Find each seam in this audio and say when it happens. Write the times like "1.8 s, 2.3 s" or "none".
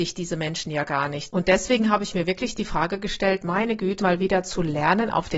1.3 s, 4.0 s